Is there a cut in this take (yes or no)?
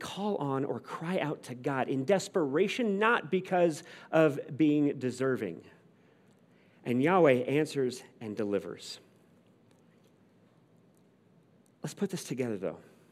no